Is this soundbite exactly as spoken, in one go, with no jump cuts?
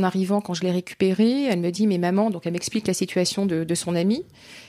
yes; 0 cuts

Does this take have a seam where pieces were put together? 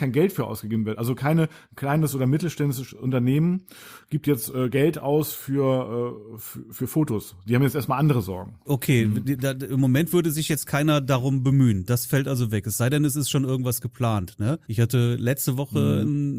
yes; 2 cuts; at 8.7 s, 14.6 s

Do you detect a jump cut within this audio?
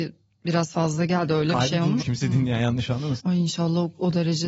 yes; 2 cuts; at 2.0 s, 3.2 s

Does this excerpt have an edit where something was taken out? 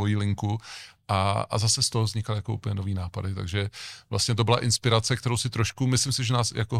no; 0 cuts

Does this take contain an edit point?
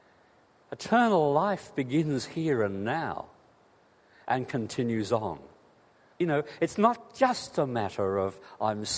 yes; 1 cut; at 6.1 s

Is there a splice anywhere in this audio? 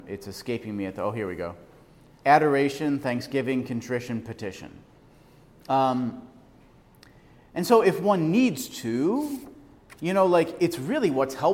no; 0 cuts

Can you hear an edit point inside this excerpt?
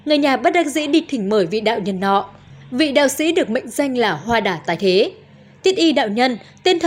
no; 0 cuts

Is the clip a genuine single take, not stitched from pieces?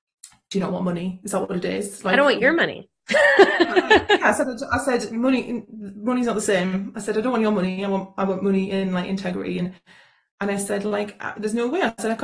yes; 0 cuts

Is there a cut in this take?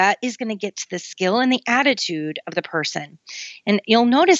no; 0 cuts

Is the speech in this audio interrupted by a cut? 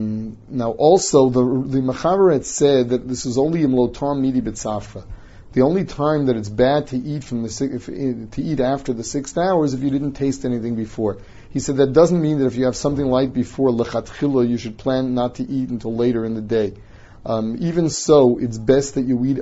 no; 0 cuts

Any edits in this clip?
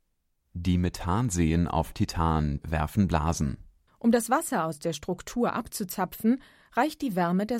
yes; 2 cuts; at 2.6 s, 3.9 s

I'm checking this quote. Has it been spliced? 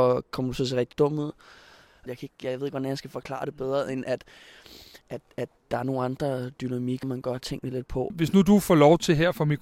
yes; 3 cuts; at 2.1 s, 7.0 s, 8.1 s

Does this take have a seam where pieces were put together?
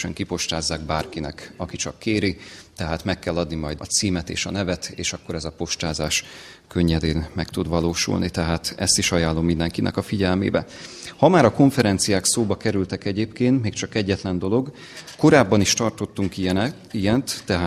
yes; 1 cut; at 3.8 s

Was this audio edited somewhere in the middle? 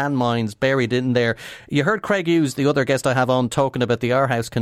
no; 0 cuts

